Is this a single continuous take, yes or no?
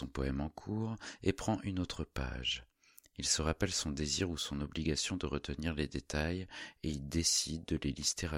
yes